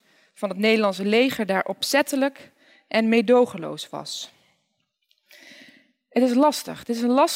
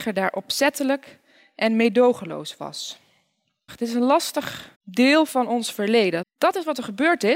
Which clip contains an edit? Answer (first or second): second